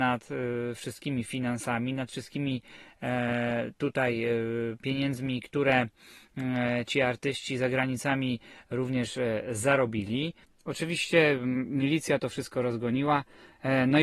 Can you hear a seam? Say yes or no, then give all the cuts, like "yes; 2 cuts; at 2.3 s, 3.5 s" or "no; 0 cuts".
yes; 1 cut; at 10.4 s